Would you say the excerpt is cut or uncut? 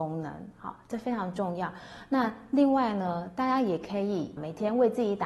uncut